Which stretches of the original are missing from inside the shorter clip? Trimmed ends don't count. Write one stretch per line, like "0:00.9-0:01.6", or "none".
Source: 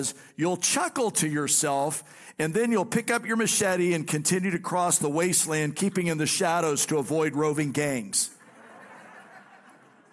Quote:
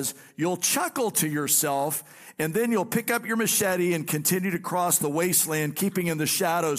none